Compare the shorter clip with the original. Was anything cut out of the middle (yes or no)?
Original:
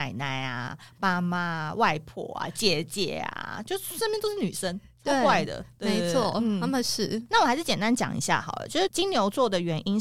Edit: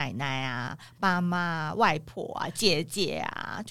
no